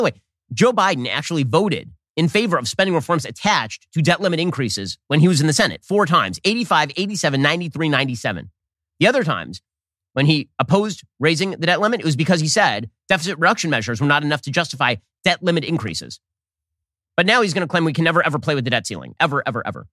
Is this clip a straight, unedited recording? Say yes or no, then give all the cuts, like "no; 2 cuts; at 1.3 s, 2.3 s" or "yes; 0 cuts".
yes; 0 cuts